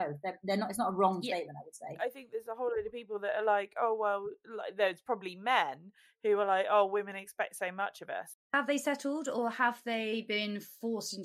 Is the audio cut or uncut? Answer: cut